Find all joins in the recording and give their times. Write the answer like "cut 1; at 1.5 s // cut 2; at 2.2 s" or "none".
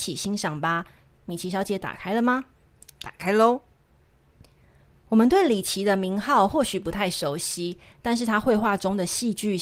none